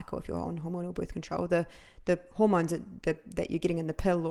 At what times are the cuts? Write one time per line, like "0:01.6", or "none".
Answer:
none

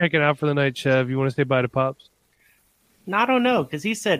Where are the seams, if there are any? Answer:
none

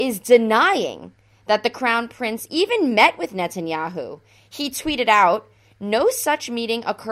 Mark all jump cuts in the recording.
none

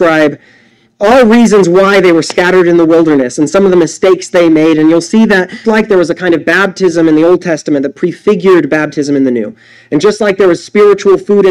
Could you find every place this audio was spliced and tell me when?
0:05.6

